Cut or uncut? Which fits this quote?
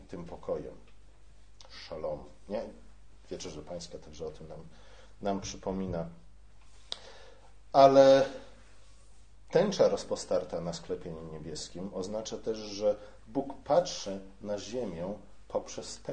uncut